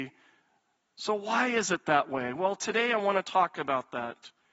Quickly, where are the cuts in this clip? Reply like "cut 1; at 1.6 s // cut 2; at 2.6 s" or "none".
none